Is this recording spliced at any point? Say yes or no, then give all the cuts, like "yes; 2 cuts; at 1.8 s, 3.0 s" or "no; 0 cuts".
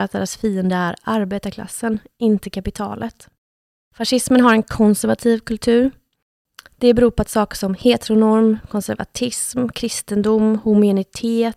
no; 0 cuts